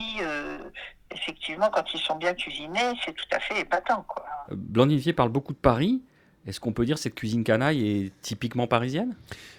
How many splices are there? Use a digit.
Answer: 0